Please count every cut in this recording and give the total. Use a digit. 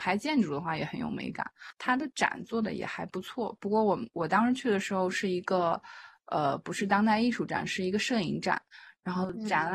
0